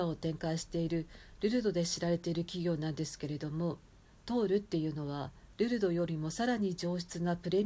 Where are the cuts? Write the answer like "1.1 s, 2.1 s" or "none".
none